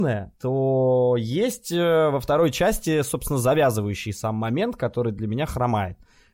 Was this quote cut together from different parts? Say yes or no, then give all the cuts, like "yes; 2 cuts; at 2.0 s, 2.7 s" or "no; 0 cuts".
no; 0 cuts